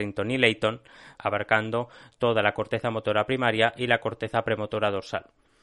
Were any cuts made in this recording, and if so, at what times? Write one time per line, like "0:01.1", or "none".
0:01.2